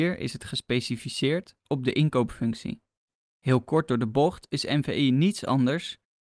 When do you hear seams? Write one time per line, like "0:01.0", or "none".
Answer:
0:03.2